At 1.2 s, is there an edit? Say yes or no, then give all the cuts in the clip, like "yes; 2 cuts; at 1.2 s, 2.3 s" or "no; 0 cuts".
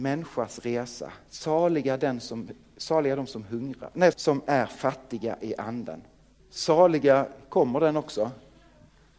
no; 2 cuts; at 4.1 s, 6.4 s